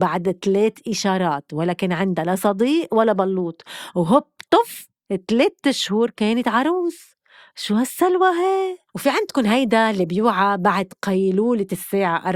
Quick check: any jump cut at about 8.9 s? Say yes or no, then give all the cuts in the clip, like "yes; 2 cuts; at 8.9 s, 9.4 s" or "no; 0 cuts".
yes; 1 cut; at 8.9 s